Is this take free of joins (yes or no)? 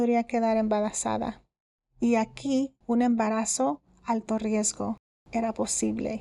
no